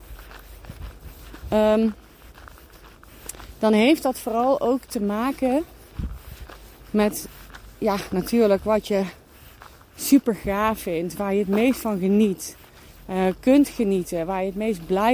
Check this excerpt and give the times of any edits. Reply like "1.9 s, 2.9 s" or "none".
none

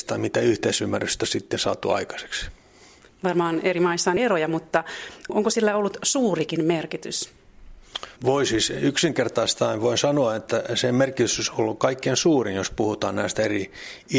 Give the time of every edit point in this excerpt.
3.1 s, 8.1 s

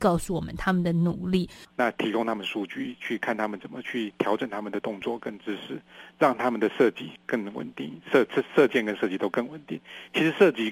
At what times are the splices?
1.7 s

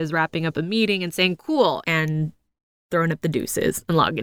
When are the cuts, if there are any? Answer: 1.8 s

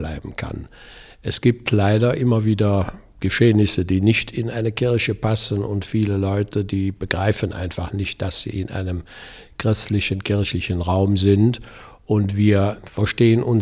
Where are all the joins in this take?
none

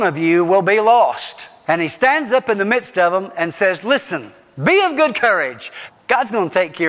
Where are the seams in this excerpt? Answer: 1.6 s, 5.9 s

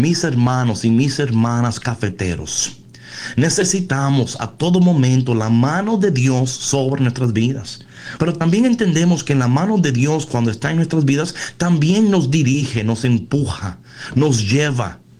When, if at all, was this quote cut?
8.2 s

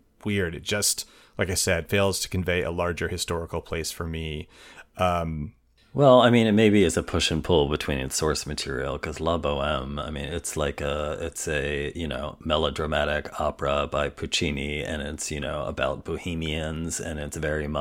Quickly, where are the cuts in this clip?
none

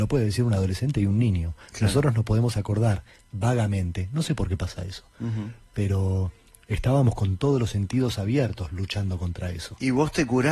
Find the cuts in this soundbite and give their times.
none

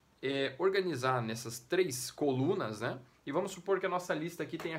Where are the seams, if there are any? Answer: 3.1 s

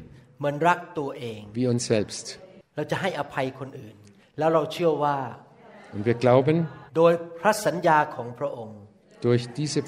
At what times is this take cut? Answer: 4.2 s, 6.9 s

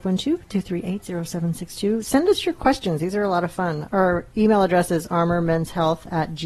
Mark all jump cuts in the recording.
none

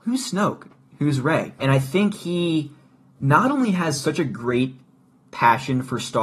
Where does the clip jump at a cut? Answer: 1.6 s

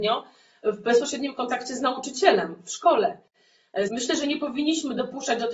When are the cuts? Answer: 3.9 s

